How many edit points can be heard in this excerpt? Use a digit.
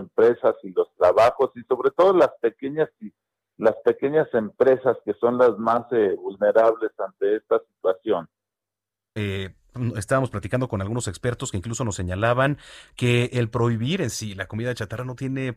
1